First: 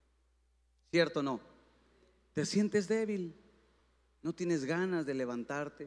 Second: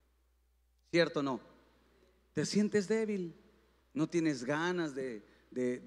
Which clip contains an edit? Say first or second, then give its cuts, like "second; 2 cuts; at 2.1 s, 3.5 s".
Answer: second; 1 cut; at 3.8 s